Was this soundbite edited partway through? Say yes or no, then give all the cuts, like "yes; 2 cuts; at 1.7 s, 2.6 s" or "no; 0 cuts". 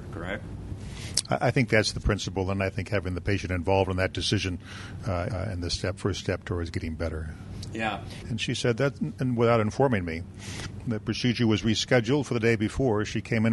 yes; 2 cuts; at 5.3 s, 8.2 s